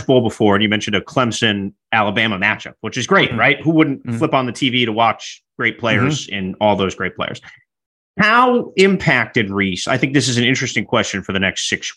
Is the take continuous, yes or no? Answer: yes